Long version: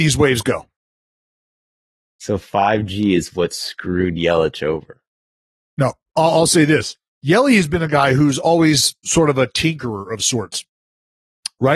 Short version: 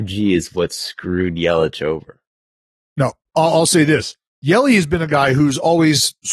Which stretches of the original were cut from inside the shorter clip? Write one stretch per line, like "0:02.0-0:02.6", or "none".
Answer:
none